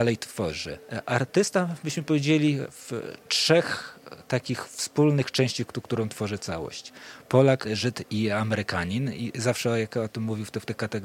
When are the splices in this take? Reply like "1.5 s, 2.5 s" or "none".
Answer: 7.6 s